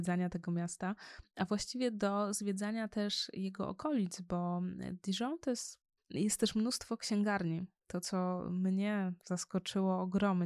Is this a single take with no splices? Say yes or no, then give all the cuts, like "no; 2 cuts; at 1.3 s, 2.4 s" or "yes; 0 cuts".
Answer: no; 1 cut; at 6.0 s